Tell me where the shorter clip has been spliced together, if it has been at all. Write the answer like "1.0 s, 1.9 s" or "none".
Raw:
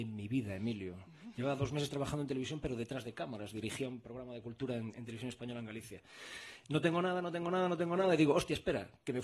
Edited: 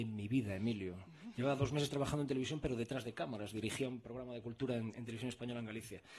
none